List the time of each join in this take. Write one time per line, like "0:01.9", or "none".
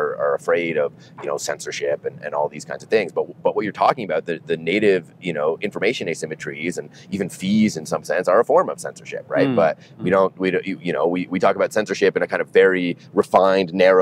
none